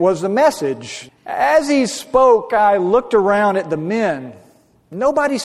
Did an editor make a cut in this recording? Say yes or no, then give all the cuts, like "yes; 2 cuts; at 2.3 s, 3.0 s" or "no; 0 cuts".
yes; 1 cut; at 1.1 s